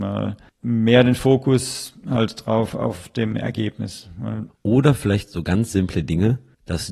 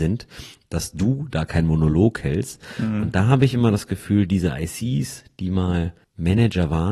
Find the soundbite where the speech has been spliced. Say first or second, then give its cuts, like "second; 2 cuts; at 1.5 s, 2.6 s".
first; 1 cut; at 4.5 s